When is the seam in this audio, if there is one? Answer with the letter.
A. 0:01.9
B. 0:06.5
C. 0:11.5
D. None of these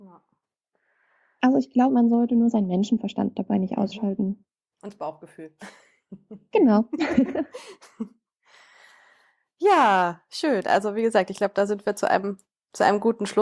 A